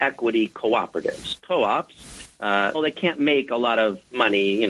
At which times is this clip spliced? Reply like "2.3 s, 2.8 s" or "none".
2.7 s